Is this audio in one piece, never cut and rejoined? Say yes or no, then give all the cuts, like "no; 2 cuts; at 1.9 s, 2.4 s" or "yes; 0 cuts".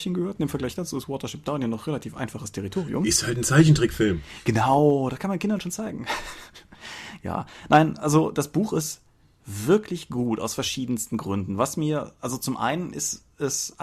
yes; 0 cuts